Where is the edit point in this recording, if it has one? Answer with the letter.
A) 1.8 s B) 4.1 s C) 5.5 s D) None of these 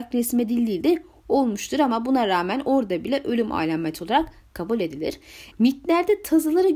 C